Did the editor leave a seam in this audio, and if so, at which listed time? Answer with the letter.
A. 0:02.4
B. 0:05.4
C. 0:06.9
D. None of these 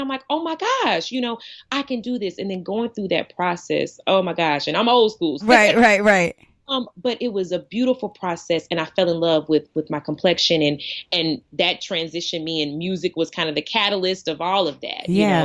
B